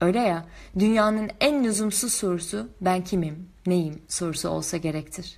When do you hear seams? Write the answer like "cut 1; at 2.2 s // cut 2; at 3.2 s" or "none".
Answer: none